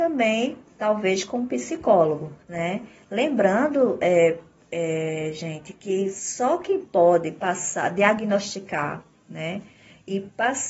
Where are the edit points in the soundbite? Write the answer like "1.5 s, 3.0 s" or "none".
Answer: 2.4 s